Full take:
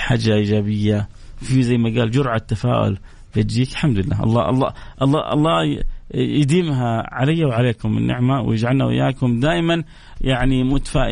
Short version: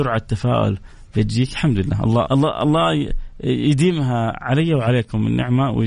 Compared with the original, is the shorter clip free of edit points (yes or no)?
no